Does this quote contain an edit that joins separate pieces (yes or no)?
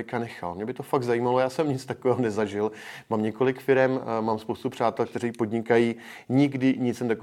no